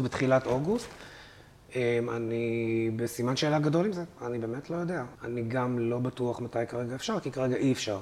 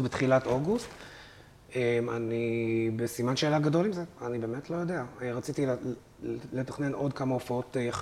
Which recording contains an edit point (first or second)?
first